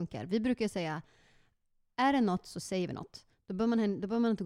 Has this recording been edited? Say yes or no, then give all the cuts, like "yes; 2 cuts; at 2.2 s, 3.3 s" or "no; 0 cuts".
no; 0 cuts